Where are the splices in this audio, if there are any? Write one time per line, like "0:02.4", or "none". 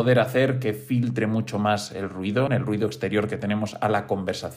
0:02.5